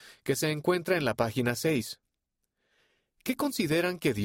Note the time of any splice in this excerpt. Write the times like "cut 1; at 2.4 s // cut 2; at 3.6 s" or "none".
none